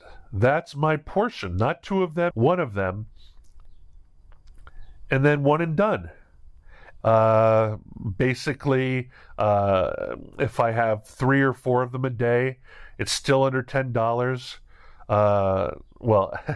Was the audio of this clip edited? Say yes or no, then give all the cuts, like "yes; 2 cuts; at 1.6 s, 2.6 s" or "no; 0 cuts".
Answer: yes; 2 cuts; at 2.3 s, 7.0 s